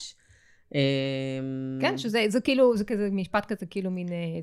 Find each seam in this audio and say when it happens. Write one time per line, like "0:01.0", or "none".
none

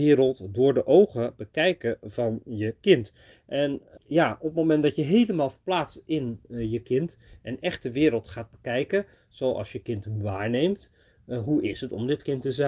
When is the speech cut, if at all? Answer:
0:04.0

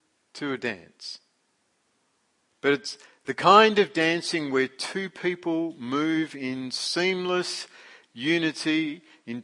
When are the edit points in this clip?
0:02.5

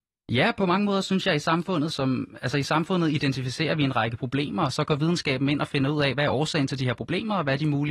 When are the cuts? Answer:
0:01.9

